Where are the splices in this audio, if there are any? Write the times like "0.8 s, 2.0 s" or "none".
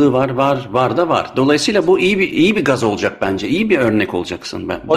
none